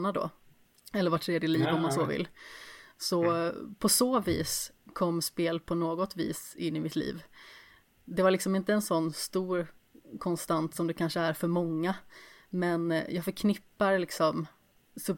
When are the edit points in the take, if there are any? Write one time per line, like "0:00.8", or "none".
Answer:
none